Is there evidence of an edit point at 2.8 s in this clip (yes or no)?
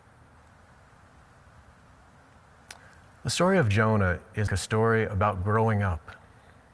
no